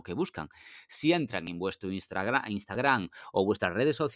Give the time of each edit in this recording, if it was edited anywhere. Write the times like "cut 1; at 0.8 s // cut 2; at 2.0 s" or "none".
none